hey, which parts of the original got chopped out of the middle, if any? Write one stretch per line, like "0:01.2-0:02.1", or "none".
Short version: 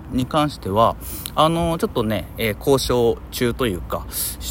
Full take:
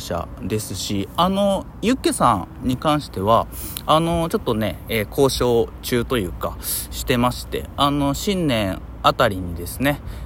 none